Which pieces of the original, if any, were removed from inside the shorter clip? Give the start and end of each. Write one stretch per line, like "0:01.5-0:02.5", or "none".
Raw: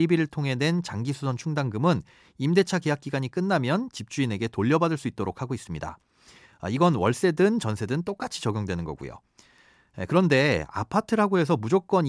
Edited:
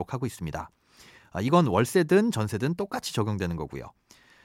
none